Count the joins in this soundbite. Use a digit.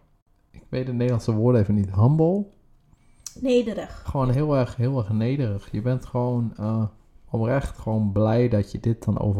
1